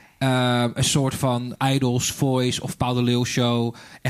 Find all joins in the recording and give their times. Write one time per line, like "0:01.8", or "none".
0:01.6